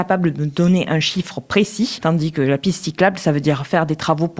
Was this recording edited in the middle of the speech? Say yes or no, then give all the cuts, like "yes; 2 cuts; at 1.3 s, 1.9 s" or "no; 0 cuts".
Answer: yes; 1 cut; at 2.0 s